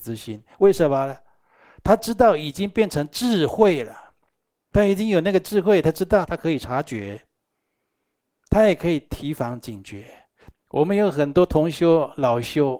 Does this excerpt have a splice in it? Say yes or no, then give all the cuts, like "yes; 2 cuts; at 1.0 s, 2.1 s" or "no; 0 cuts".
yes; 2 cuts; at 6.3 s, 10.5 s